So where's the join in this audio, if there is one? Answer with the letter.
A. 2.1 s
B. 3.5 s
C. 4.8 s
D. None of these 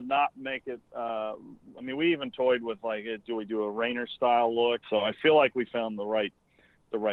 C